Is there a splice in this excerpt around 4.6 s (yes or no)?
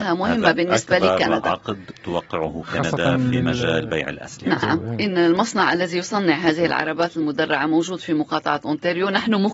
yes